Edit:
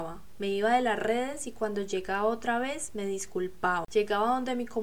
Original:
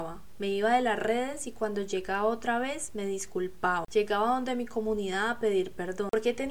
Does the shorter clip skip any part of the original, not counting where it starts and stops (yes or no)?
no